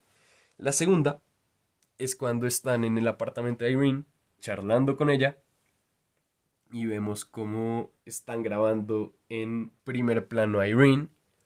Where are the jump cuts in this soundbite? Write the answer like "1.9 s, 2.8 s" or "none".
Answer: 4.4 s, 8.0 s, 9.8 s